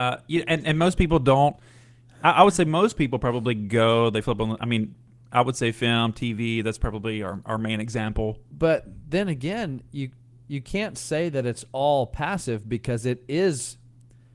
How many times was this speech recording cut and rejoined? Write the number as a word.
one